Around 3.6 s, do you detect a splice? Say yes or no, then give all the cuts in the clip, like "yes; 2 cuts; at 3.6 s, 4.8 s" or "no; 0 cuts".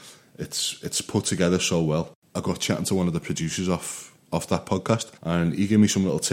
no; 1 cut; at 5.2 s